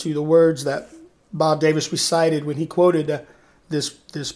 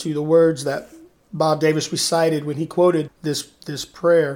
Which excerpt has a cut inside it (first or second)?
second